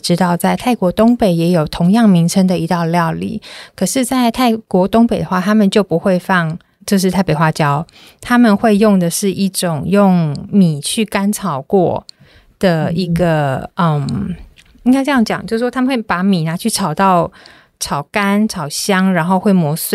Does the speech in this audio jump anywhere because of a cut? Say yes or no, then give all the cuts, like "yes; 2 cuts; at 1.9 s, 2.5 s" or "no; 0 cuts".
no; 0 cuts